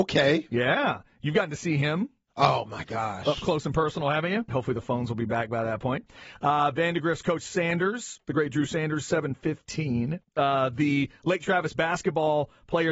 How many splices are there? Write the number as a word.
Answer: two